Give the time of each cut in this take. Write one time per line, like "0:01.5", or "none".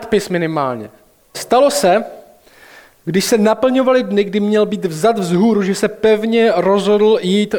0:01.3

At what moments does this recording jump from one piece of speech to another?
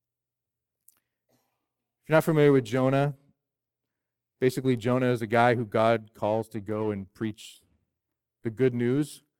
none

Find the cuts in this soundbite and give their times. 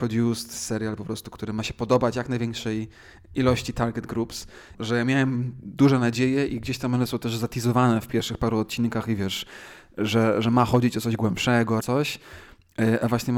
0:04.7
0:11.8

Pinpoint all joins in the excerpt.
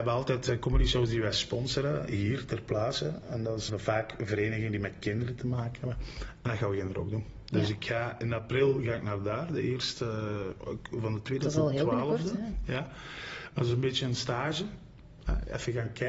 0:03.7

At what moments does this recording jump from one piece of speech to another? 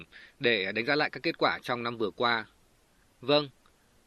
0:03.0

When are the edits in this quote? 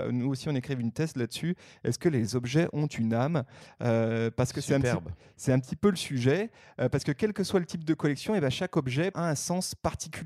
0:09.1

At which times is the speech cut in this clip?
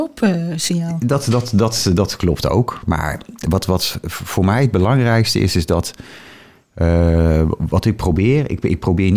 none

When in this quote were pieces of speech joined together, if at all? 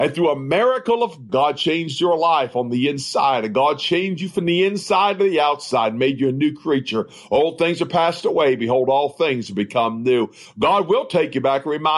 0:01.3

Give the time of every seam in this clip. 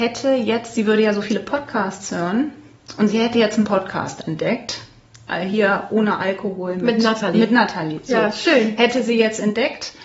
none

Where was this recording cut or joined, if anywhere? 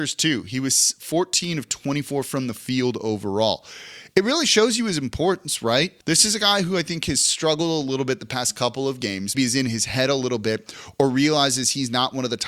0:06.0
0:09.3

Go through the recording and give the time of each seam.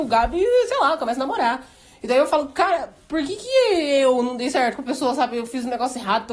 none

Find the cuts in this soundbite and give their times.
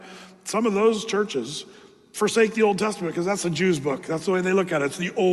none

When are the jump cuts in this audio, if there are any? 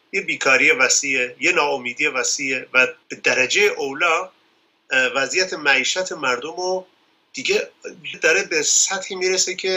0:03.0
0:08.1

